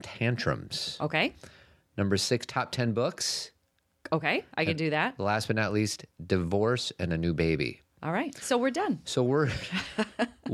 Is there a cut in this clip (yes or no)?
no